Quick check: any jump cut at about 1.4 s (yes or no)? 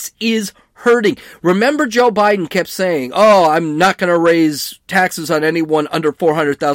no